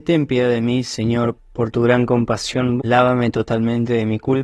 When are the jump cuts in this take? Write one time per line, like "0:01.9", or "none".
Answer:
0:01.4
0:02.8